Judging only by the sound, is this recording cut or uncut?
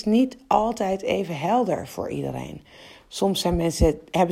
uncut